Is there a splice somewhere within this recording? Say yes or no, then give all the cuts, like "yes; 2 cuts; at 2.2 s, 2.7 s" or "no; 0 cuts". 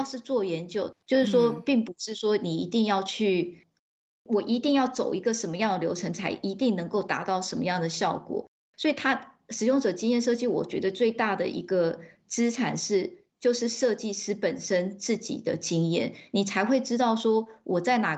yes; 1 cut; at 0.9 s